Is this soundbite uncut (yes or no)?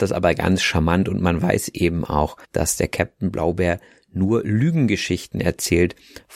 no